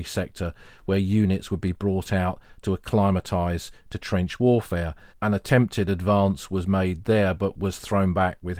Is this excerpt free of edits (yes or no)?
no